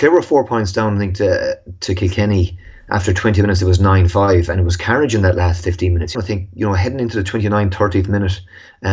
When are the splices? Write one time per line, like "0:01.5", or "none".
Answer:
0:06.1